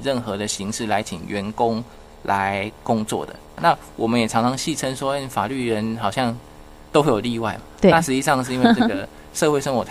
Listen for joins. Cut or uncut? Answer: cut